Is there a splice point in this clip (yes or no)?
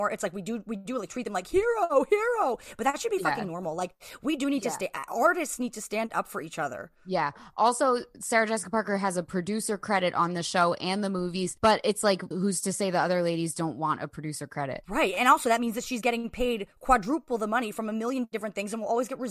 yes